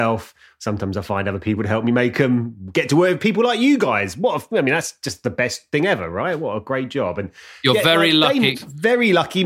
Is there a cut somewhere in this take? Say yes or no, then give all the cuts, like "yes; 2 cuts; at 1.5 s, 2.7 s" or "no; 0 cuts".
yes; 1 cut; at 8.5 s